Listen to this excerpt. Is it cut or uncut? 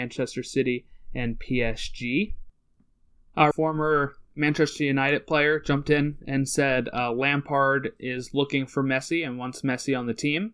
cut